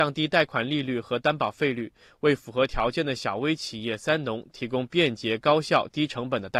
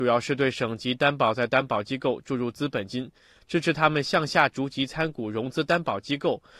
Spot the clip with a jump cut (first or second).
second